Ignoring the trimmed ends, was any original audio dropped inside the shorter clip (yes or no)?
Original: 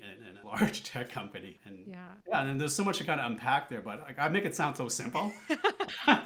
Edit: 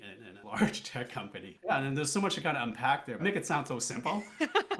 yes